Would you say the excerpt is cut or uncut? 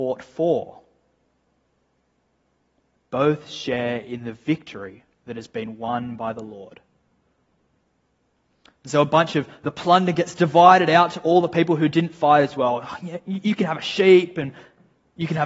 uncut